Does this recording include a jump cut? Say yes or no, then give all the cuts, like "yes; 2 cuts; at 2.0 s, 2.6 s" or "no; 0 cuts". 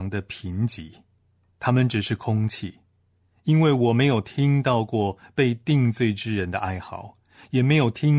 no; 0 cuts